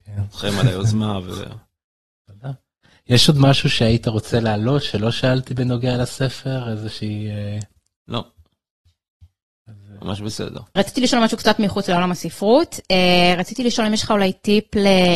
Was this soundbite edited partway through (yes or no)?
yes